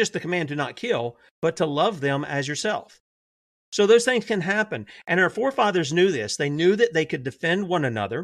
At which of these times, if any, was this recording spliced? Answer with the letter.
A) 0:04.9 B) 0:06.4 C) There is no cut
C